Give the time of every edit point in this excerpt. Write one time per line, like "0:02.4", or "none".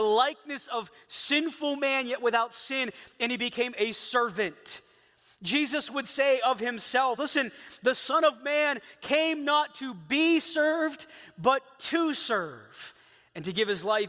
0:07.2